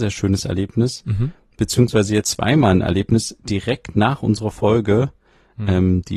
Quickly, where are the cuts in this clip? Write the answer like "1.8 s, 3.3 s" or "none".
2.2 s